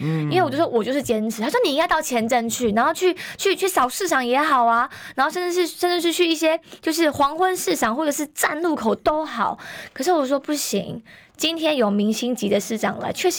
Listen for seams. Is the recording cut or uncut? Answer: uncut